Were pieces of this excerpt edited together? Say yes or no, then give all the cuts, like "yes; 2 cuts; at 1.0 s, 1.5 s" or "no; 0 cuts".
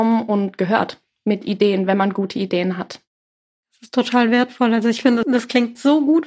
yes; 1 cut; at 5.2 s